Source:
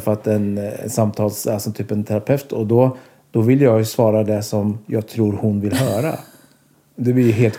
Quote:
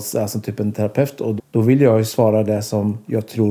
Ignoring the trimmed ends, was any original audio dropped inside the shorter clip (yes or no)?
yes